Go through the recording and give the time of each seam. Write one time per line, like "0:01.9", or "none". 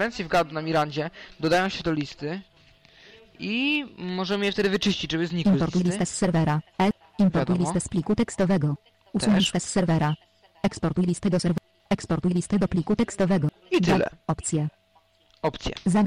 none